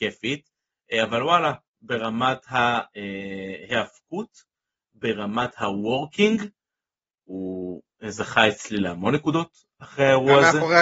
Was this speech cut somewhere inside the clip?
no; 0 cuts

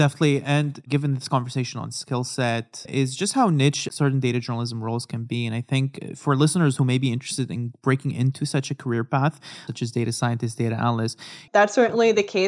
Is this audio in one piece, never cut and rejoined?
no; 2 cuts; at 9.7 s, 11.5 s

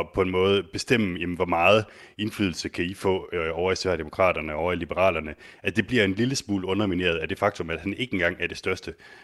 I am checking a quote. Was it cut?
no; 0 cuts

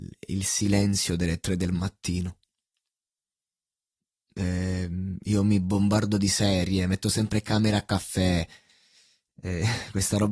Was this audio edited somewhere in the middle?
no; 0 cuts

